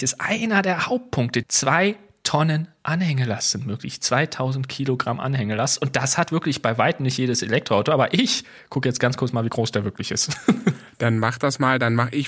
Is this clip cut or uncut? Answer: cut